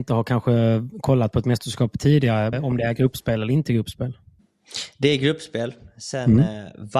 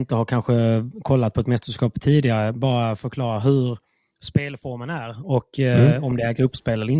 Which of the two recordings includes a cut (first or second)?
first